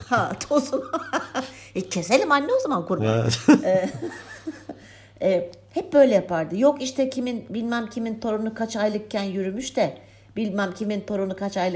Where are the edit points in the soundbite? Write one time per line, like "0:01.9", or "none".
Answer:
none